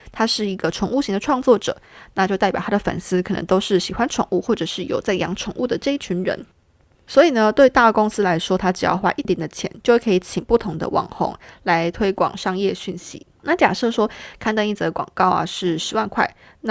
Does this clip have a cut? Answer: yes; 1 cut; at 9.2 s

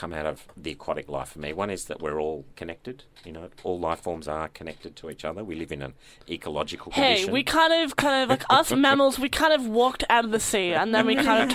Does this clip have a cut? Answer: no; 0 cuts

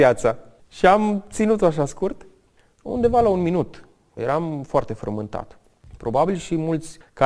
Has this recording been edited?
yes; 2 cuts; at 2.7 s, 4.2 s

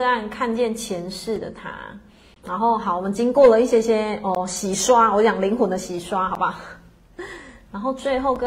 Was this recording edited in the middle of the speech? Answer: no; 0 cuts

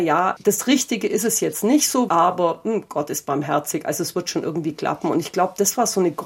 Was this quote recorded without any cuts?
no; 1 cut; at 2.1 s

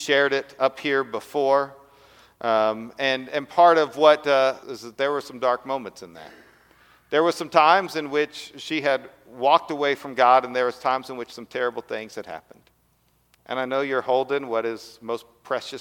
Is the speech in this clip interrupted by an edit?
yes; 2 cuts; at 4.6 s, 13.4 s

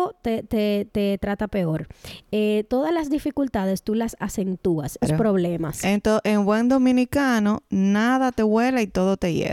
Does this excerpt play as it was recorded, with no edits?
no; 1 cut; at 5.0 s

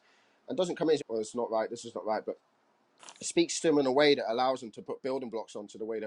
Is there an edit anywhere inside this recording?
yes; 1 cut; at 1.0 s

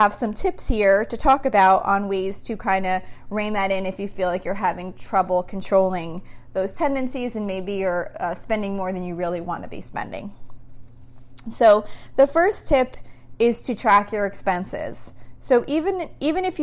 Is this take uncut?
yes; 0 cuts

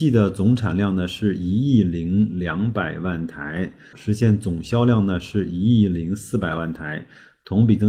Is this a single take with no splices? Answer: no; 1 cut; at 3.9 s

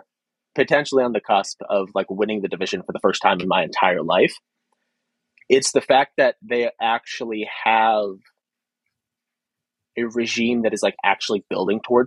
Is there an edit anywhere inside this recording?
no; 0 cuts

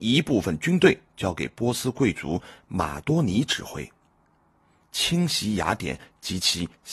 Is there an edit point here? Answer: yes; 1 cut; at 4.8 s

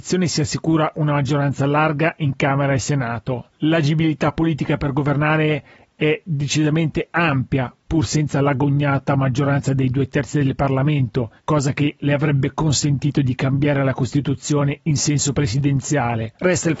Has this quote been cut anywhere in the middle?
no; 0 cuts

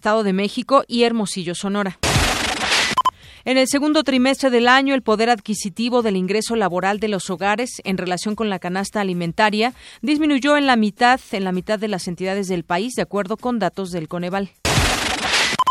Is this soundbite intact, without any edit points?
yes; 0 cuts

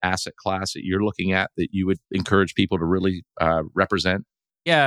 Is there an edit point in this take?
yes; 1 cut; at 2.0 s

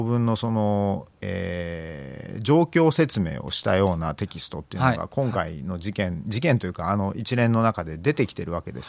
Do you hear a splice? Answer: no; 0 cuts

